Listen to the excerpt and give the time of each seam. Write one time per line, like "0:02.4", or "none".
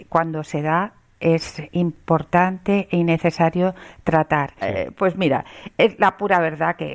0:04.6